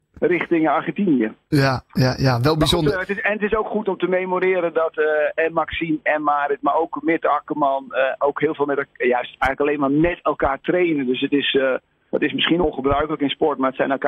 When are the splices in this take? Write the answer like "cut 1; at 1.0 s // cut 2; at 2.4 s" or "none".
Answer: none